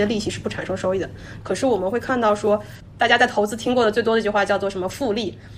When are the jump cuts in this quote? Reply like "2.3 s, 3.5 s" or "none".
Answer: 1.4 s